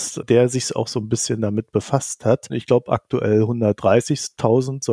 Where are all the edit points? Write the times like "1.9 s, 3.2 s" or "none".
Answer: 2.5 s